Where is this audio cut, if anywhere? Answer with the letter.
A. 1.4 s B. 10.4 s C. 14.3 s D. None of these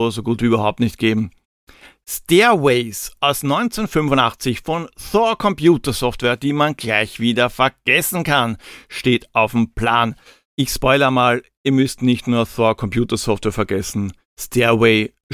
D